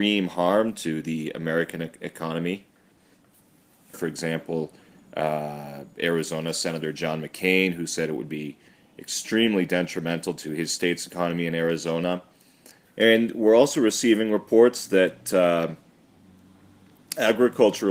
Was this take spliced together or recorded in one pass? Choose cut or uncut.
cut